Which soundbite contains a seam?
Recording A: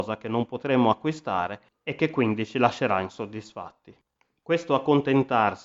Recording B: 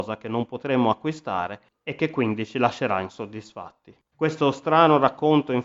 B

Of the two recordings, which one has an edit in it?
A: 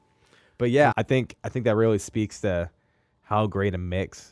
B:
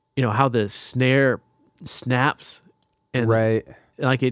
A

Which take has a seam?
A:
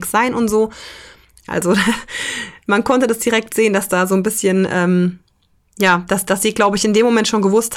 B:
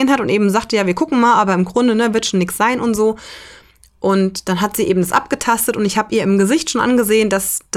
A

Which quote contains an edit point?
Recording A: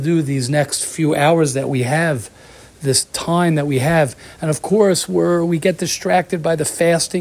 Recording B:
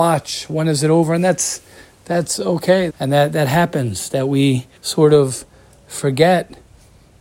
B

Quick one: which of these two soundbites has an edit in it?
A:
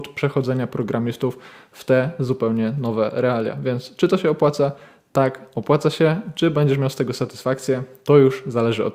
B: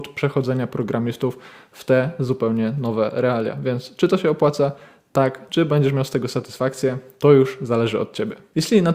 B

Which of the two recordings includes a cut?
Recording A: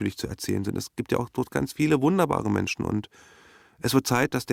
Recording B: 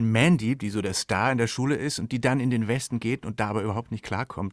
A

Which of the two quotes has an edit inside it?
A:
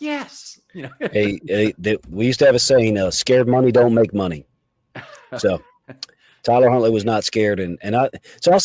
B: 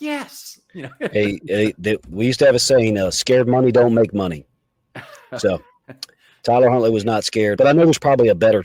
B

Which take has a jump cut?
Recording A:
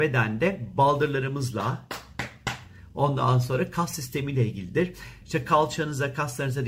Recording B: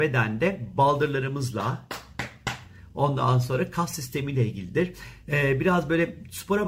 A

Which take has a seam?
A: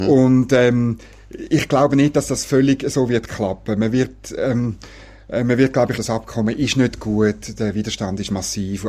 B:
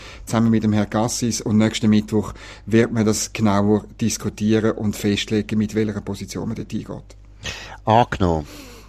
A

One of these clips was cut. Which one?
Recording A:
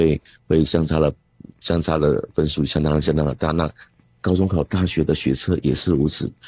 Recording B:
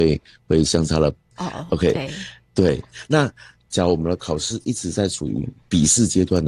B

